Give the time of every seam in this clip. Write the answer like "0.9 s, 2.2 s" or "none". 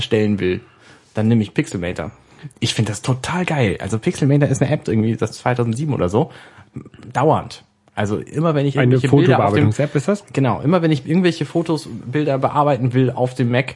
2.5 s, 4.8 s